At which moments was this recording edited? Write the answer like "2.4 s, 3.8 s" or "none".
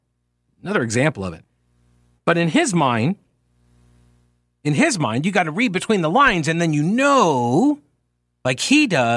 2.2 s